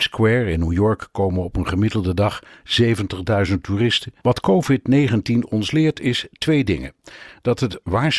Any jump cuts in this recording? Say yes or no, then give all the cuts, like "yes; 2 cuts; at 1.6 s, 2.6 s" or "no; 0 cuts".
yes; 1 cut; at 4.2 s